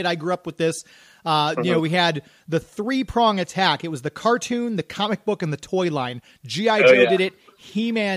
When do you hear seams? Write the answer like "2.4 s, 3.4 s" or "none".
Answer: none